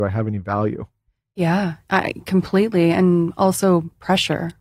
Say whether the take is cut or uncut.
uncut